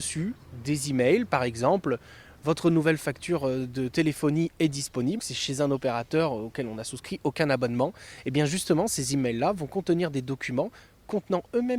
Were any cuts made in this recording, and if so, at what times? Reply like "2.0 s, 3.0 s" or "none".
5.2 s